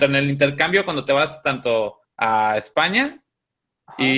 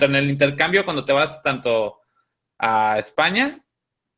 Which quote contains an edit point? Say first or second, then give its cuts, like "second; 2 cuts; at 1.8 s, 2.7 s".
first; 1 cut; at 2.0 s